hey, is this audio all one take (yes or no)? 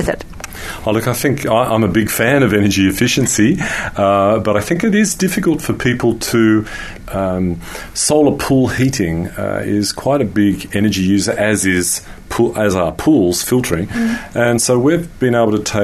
no